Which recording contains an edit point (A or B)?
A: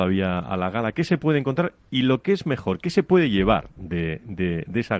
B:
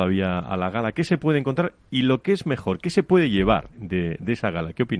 B